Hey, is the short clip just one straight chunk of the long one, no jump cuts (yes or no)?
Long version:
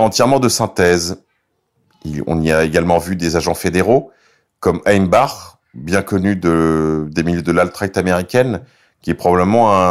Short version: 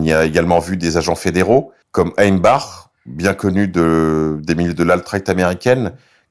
no